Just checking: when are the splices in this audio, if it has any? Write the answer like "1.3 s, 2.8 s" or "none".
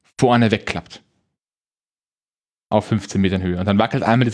none